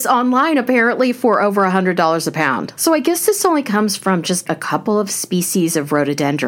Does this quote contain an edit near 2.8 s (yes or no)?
yes